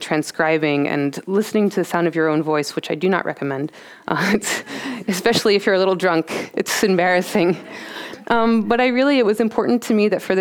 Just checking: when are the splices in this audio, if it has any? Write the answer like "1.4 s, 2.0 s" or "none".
none